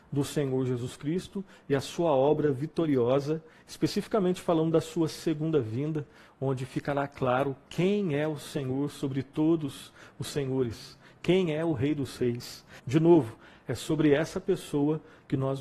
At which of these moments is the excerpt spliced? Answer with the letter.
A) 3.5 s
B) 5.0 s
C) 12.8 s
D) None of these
C